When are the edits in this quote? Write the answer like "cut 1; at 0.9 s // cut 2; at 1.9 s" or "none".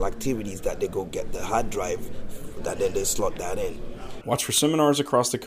cut 1; at 4.2 s